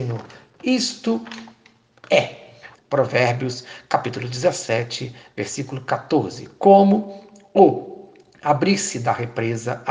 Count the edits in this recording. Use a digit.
1